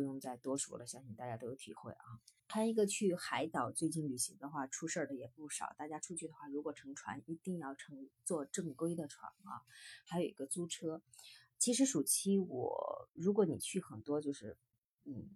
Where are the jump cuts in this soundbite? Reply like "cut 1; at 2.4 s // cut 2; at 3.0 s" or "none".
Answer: cut 1; at 2.4 s